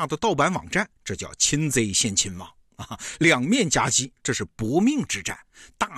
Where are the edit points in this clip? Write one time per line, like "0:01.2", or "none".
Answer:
0:04.2

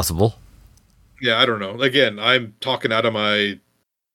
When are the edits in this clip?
none

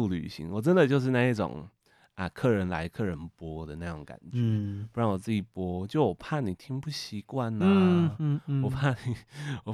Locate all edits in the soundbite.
none

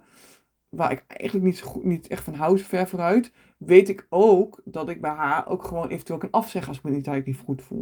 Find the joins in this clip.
none

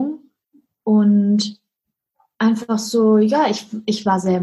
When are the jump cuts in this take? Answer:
none

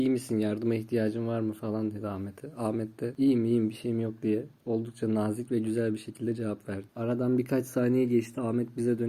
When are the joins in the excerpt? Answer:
none

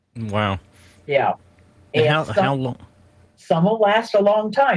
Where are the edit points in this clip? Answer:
none

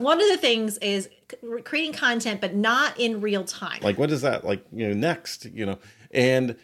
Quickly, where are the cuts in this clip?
0:03.8

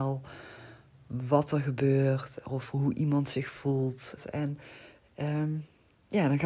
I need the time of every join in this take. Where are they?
0:04.2

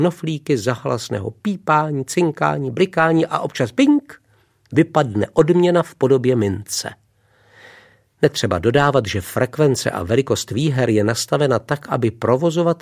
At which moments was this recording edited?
none

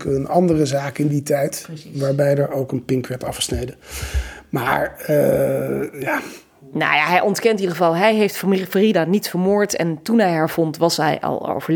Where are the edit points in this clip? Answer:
none

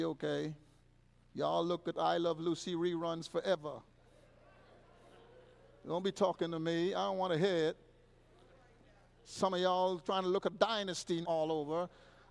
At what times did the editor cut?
0:11.2

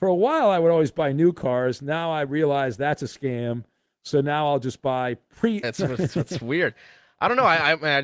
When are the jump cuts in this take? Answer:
0:05.6

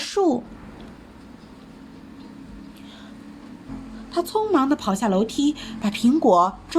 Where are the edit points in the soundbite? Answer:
0:03.7

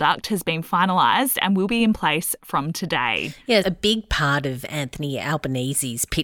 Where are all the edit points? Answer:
0:03.6

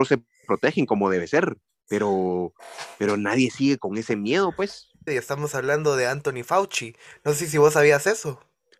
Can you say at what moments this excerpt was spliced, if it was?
0:05.1

